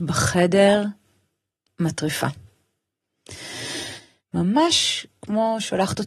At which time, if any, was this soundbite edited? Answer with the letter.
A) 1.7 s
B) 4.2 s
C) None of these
B